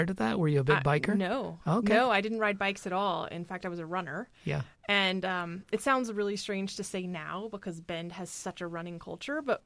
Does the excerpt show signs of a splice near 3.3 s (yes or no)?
no